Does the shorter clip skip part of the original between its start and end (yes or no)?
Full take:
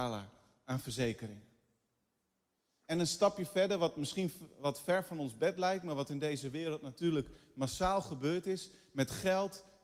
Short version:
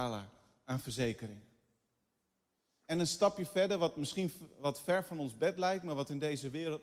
no